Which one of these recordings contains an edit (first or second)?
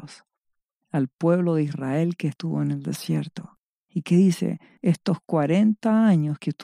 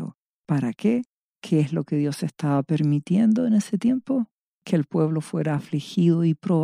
second